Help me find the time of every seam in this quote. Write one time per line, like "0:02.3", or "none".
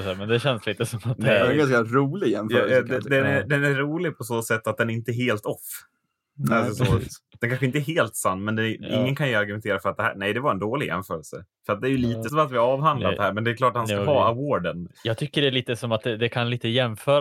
0:12.3
0:14.9